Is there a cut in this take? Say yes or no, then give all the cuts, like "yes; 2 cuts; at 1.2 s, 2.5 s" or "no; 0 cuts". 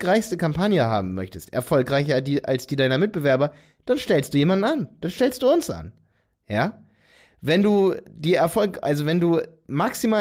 no; 0 cuts